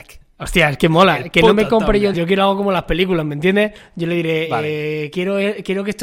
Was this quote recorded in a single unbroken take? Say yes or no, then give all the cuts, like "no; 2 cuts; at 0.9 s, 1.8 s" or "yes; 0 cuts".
no; 1 cut; at 2.1 s